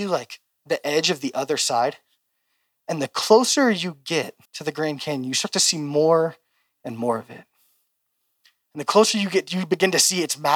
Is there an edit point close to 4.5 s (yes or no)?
yes